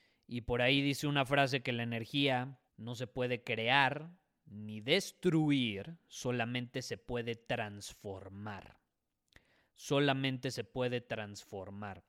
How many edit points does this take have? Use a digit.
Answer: 1